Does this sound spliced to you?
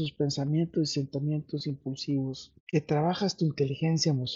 yes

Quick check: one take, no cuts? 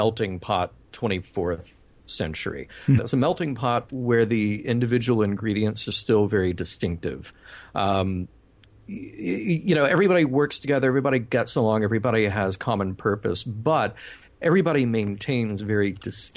no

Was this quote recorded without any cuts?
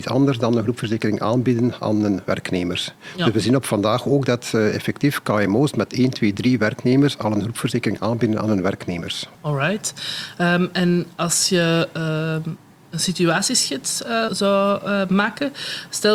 no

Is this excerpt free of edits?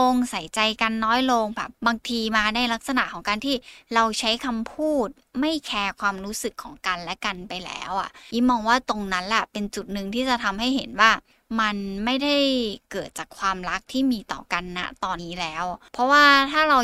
no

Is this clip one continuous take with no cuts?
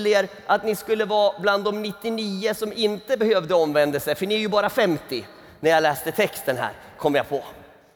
yes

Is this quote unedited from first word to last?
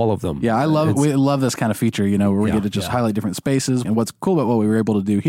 no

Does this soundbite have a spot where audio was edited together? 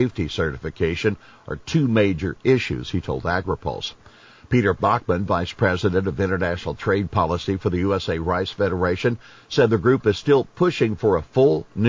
no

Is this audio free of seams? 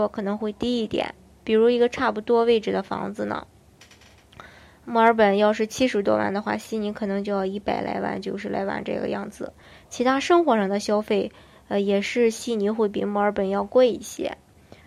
yes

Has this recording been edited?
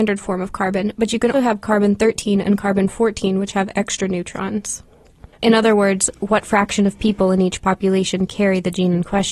yes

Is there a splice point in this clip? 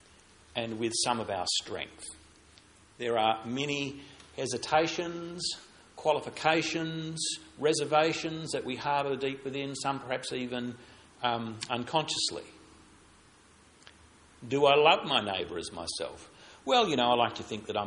no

